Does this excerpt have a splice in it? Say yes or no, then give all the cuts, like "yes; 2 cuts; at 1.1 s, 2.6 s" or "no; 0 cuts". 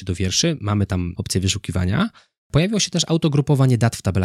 no; 0 cuts